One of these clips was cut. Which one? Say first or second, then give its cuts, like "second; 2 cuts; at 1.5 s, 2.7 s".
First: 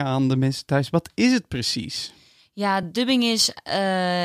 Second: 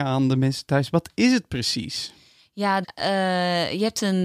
second; 1 cut; at 2.8 s